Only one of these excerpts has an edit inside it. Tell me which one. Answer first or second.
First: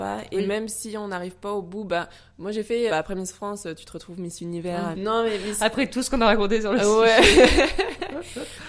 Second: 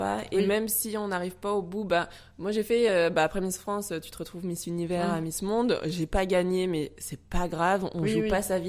first